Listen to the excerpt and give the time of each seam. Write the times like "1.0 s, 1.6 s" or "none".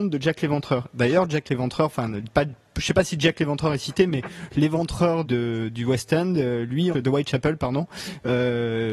5.2 s, 6.9 s